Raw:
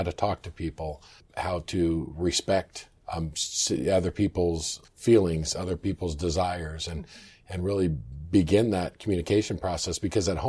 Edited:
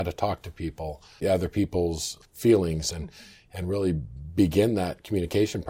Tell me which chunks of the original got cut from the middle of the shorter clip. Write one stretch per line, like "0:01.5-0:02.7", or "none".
0:01.2-0:03.8
0:05.5-0:06.9